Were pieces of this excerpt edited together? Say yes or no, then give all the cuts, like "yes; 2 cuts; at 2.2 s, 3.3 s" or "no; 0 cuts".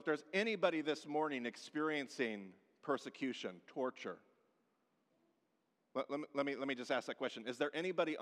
no; 0 cuts